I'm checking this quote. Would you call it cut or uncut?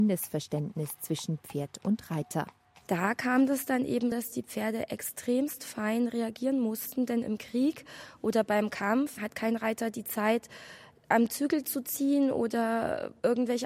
cut